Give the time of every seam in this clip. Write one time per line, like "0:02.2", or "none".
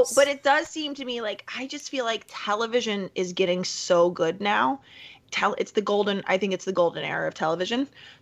0:05.2